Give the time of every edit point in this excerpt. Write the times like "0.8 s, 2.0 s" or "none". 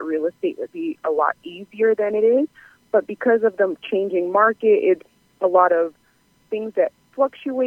none